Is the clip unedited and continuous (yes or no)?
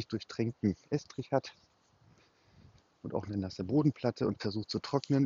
yes